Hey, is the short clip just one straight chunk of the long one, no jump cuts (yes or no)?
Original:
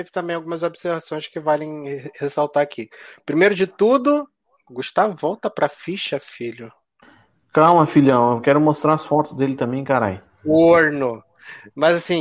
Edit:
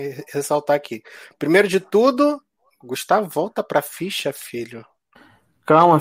yes